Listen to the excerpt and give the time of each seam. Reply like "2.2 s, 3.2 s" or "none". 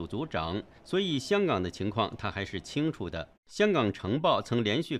3.4 s